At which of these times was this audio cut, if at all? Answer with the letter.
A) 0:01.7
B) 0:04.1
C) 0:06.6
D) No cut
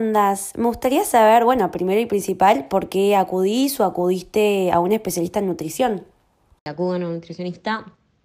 D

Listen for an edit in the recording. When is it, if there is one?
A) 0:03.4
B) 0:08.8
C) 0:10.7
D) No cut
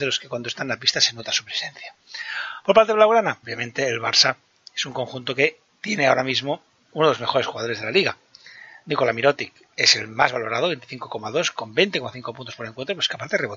A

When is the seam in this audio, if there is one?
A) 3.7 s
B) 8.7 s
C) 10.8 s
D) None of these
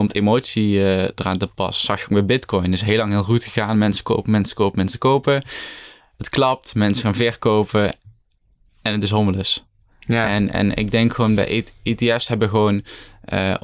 D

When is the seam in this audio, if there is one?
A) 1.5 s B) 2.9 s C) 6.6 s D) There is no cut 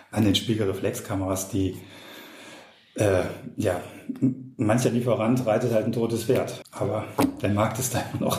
C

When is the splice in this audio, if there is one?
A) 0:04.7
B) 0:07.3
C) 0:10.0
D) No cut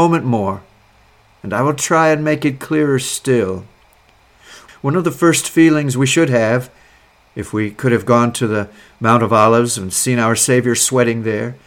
A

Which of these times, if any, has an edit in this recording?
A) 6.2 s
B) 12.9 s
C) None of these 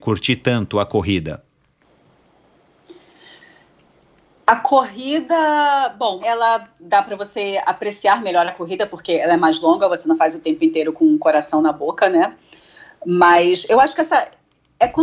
A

